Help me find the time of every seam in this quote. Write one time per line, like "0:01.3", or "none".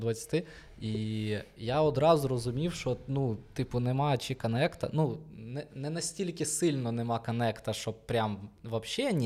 none

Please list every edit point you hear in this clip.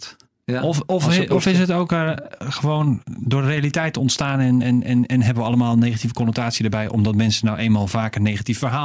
none

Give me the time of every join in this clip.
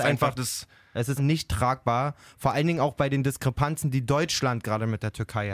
0:01.2

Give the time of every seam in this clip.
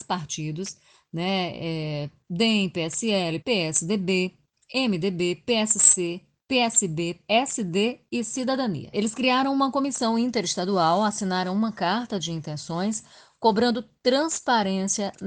0:03.4
0:07.2

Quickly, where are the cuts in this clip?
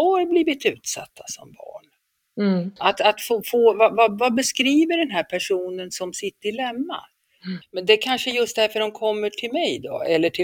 0:02.8
0:07.6

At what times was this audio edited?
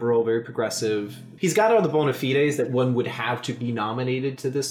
0:01.4

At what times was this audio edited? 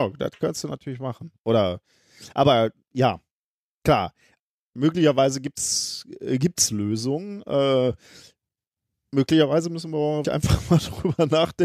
0:10.2

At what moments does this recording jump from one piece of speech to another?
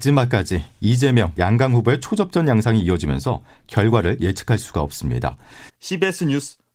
0:01.4
0:05.7

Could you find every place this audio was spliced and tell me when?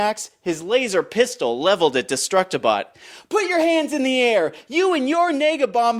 none

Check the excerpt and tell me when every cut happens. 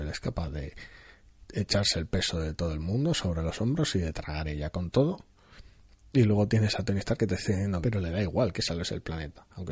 0:07.8

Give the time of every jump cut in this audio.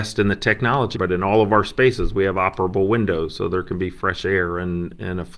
0:00.9

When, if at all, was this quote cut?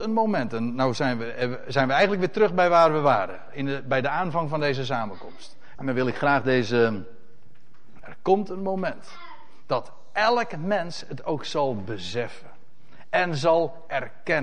0:05.7
0:08.0

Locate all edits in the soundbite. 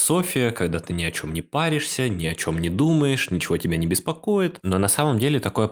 0:04.6

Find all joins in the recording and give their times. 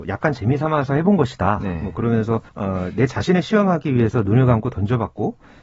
0:02.5

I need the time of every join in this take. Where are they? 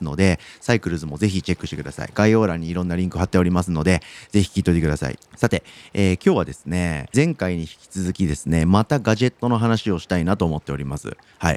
0:05.2
0:07.1

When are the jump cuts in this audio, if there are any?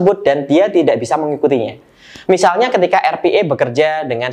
none

